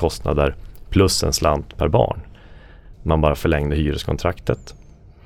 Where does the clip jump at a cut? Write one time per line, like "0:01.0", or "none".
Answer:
0:02.9